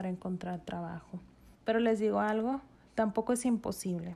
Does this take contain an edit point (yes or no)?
yes